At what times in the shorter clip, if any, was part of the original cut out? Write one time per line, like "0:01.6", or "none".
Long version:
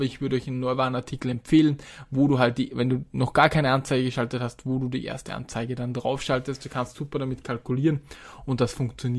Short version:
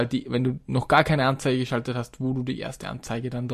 none

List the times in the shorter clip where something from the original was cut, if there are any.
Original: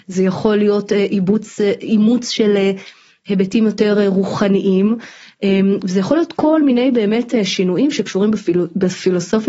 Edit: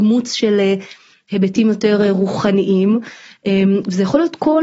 none

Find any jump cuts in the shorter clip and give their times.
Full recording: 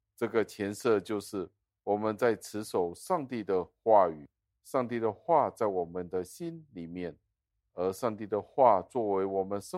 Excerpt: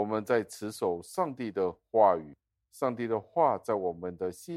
none

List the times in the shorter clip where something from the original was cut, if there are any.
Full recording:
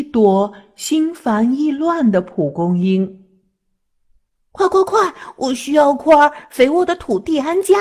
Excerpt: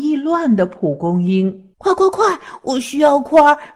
0:01.7

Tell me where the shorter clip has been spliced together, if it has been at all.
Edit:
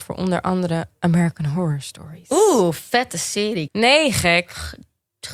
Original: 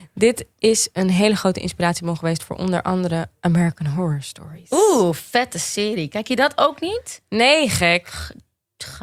0:03.7

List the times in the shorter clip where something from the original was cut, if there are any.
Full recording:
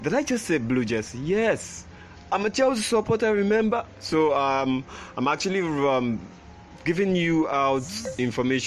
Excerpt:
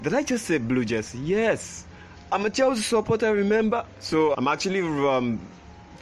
0:04.3

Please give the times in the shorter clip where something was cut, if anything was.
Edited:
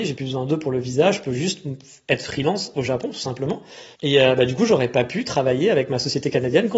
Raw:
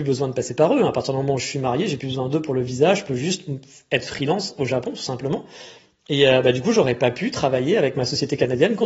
0:03.9

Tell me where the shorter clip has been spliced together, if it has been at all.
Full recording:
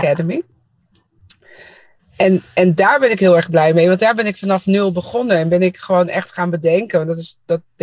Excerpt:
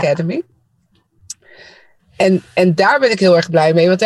none

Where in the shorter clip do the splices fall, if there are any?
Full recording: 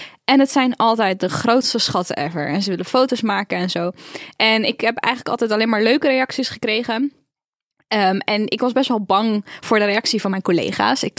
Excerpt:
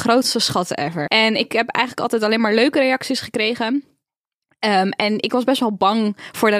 0:01.1

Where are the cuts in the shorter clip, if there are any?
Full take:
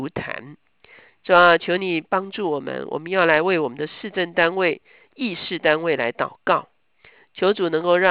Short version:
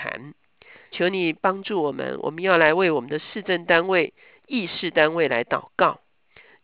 0:00.9

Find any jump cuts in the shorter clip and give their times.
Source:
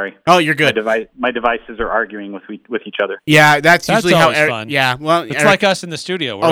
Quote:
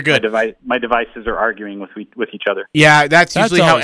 none

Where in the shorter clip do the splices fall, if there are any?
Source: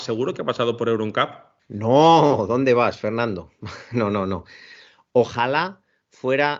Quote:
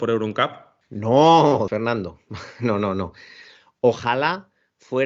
0:01.7

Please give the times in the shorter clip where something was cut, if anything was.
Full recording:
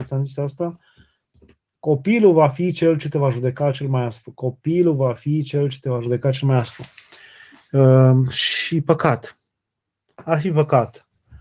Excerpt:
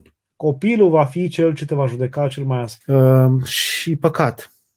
0:02.8

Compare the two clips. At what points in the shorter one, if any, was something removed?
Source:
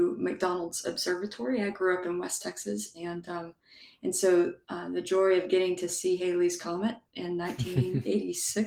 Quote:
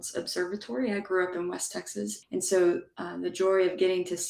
0:02.2

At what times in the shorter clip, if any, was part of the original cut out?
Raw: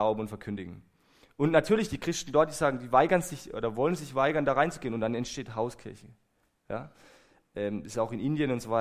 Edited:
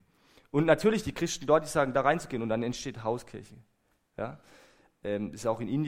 0:01.9

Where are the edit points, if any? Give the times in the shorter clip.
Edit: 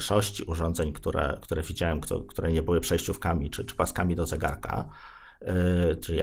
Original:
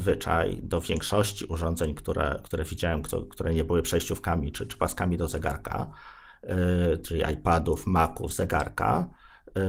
none

